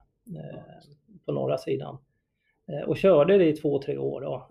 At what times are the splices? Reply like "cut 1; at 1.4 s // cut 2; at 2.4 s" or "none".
none

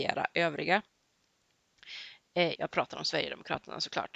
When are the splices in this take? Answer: cut 1; at 2.6 s

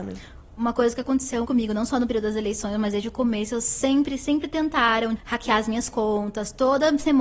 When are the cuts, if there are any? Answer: cut 1; at 1.4 s // cut 2; at 5.2 s

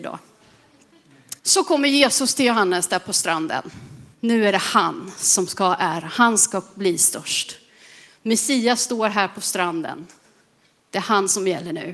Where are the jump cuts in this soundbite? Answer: cut 1; at 1.4 s // cut 2; at 4.1 s

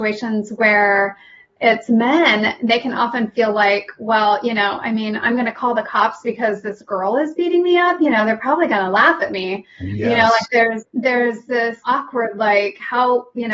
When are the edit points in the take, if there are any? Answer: cut 1; at 10.8 s // cut 2; at 11.8 s

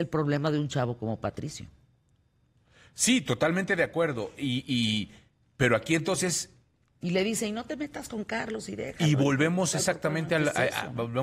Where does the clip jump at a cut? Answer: none

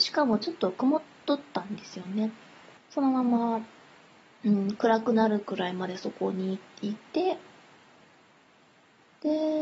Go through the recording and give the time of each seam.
cut 1; at 2.8 s

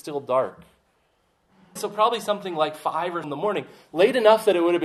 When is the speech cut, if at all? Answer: cut 1; at 1.8 s // cut 2; at 3.2 s

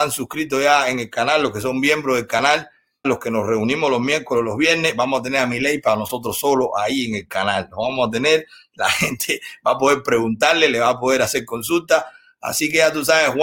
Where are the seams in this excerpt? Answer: cut 1; at 3.0 s

